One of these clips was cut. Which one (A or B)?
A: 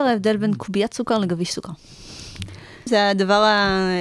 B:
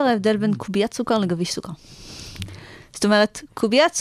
A